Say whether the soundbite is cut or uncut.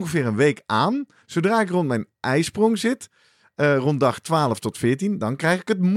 cut